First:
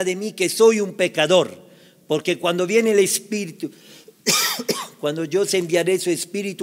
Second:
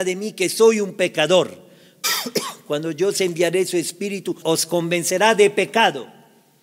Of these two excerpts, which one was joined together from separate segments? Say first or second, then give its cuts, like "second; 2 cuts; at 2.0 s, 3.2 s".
second; 2 cuts; at 2.0 s, 4.4 s